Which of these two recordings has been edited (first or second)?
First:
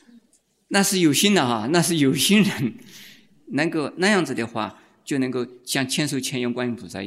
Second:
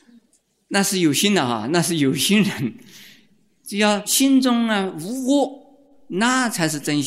first